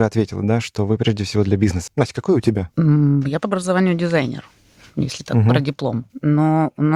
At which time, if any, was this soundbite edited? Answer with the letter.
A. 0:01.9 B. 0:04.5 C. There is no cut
A